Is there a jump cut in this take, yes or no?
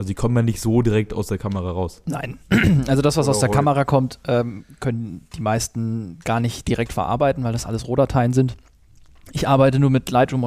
no